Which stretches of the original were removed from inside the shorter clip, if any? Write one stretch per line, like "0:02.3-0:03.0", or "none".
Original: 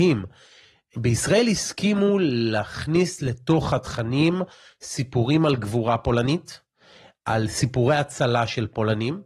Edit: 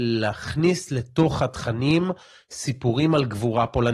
none